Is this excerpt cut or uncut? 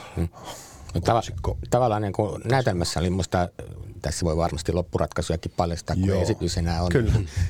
uncut